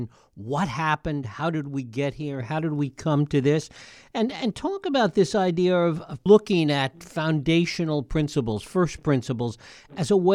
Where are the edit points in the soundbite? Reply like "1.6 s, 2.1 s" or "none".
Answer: none